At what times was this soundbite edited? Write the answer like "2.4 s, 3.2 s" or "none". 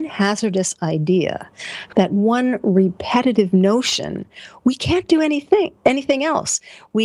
1.9 s